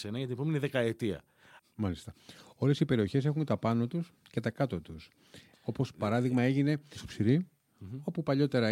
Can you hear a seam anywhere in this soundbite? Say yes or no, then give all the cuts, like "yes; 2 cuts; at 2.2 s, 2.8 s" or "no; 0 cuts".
yes; 2 cuts; at 1.6 s, 5.5 s